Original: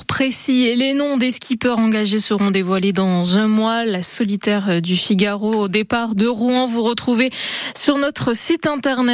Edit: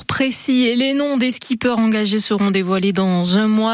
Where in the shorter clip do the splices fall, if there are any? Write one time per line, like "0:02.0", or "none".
none